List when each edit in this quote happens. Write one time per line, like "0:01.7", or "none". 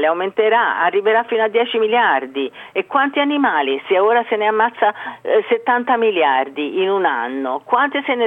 none